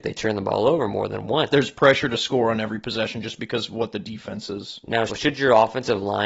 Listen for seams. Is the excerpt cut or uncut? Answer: cut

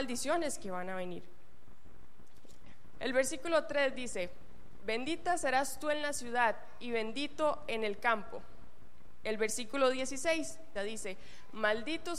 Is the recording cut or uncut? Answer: cut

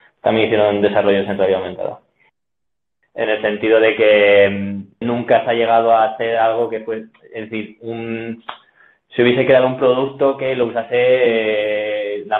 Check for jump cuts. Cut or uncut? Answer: cut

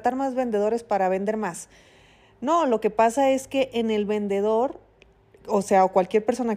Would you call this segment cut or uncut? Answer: uncut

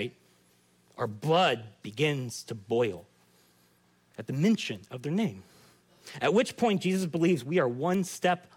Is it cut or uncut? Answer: cut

